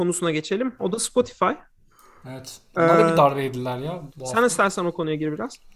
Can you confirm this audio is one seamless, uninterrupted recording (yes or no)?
no